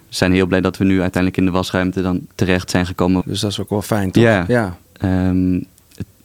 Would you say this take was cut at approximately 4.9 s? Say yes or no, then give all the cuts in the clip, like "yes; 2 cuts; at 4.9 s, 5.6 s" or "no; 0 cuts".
yes; 2 cuts; at 3.2 s, 4.9 s